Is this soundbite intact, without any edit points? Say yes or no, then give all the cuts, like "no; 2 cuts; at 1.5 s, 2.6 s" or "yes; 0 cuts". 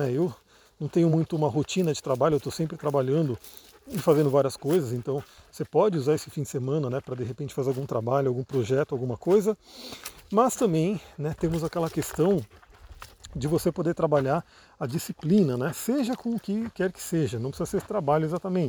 yes; 0 cuts